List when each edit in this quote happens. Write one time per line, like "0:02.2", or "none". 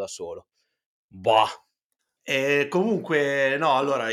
0:02.2